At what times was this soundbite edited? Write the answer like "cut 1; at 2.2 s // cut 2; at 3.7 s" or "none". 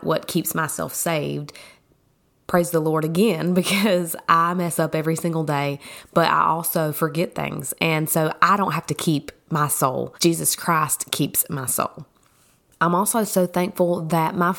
cut 1; at 10.2 s